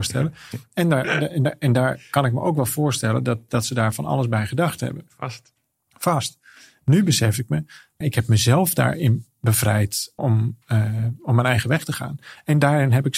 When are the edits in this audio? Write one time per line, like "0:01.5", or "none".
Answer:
0:08.0
0:10.2